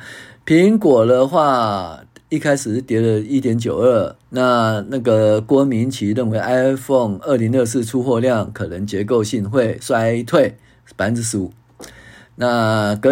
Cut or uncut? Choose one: cut